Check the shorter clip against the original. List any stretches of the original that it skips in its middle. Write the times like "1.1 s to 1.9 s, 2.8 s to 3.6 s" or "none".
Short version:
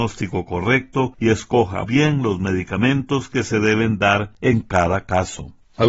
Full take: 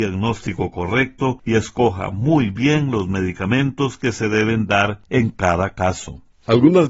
2.1 s to 2.5 s